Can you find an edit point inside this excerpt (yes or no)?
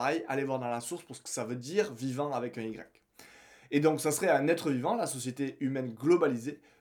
no